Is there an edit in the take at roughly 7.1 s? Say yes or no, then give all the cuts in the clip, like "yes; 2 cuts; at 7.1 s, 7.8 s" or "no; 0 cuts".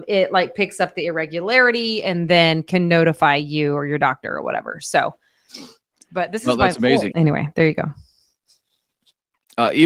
yes; 1 cut; at 7.1 s